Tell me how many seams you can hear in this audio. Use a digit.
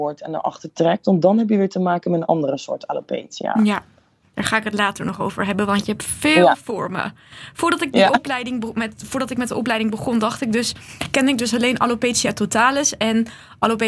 0